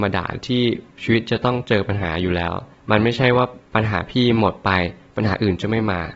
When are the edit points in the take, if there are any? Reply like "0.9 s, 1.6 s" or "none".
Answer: none